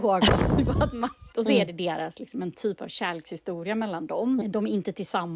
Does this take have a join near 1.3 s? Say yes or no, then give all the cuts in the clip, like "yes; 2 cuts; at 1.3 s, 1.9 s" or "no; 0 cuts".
yes; 2 cuts; at 1.3 s, 4.4 s